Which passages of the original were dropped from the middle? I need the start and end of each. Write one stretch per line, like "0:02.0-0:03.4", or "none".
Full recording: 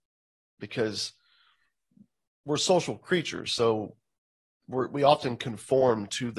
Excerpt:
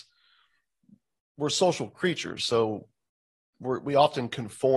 none